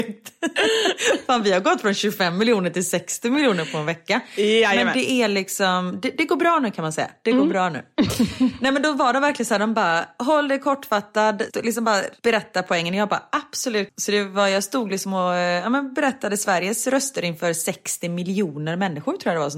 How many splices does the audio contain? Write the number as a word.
one